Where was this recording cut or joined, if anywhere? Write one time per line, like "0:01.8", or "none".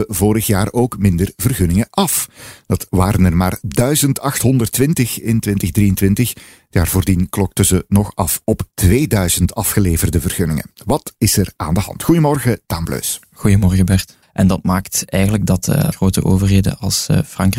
0:14.2
0:15.9